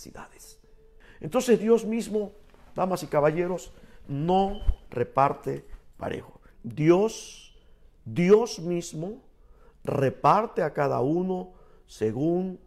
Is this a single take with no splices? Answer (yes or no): no